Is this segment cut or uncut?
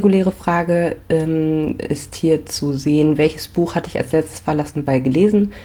uncut